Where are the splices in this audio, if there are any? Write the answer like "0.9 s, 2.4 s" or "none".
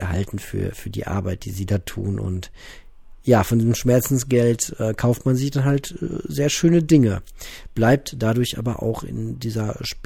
none

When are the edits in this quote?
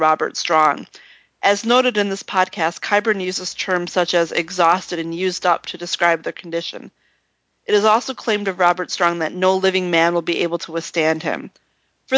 none

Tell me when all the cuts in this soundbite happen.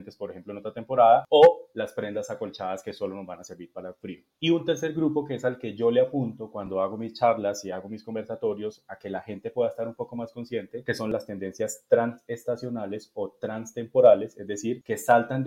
none

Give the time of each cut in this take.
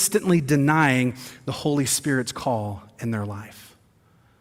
none

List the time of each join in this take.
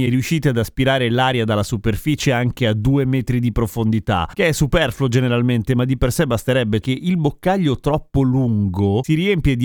4.3 s, 6.8 s

